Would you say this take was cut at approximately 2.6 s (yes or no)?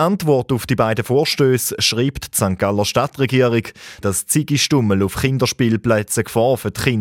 no